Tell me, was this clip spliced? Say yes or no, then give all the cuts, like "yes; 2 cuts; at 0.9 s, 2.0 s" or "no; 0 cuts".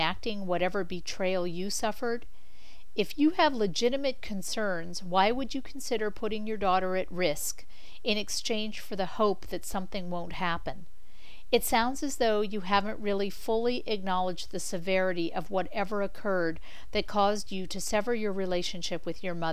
no; 0 cuts